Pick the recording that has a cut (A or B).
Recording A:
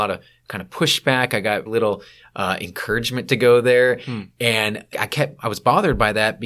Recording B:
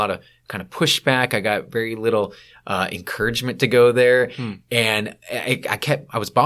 A